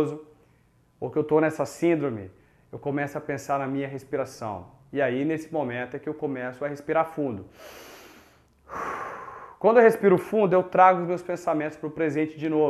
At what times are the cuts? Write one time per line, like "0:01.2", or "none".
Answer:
none